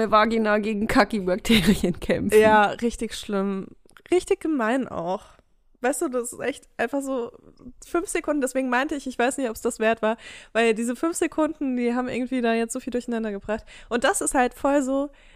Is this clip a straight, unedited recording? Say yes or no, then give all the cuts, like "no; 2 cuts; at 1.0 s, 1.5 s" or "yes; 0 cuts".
yes; 0 cuts